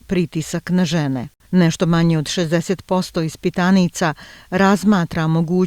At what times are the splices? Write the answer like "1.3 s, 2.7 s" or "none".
1.4 s